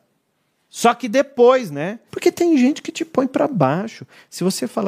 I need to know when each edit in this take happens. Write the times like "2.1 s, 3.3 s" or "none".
2.1 s